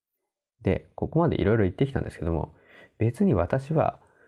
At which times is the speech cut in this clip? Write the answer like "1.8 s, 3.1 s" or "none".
none